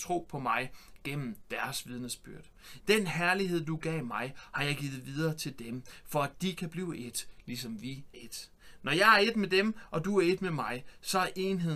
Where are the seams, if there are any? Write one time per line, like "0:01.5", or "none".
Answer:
0:02.8
0:08.1